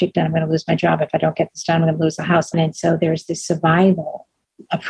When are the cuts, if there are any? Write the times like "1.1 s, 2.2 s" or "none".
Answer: 2.5 s

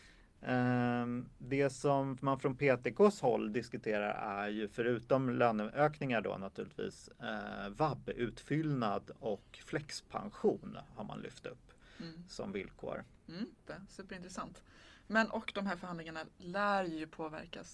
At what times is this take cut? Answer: 13.7 s

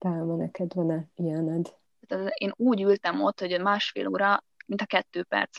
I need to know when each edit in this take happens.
1.9 s

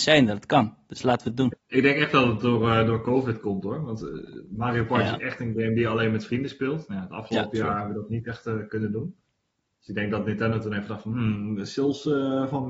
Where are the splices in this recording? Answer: 1.5 s

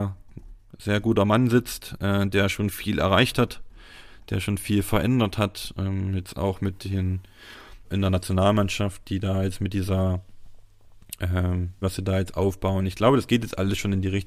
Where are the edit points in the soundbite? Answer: 7.8 s, 11.8 s

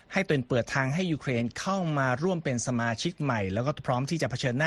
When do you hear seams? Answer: none

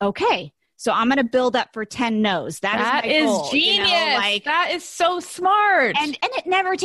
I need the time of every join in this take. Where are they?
none

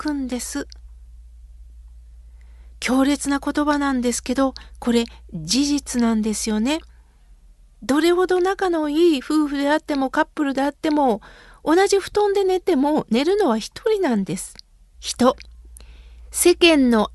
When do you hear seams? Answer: 12.6 s, 14.9 s

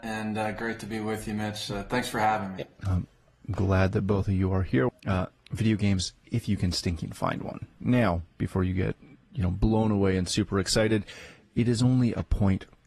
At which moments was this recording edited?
4.9 s, 7.8 s

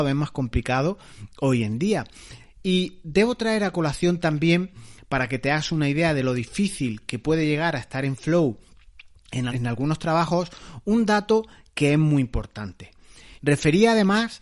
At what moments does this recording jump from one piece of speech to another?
2.4 s, 9.5 s, 13.4 s

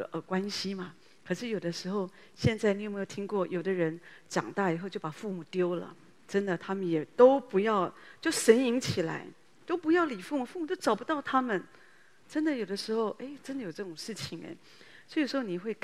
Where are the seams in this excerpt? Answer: none

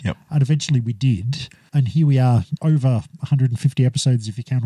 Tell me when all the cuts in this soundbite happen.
2.6 s

